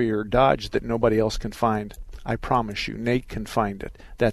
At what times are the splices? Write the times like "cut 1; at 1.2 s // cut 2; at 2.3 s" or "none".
none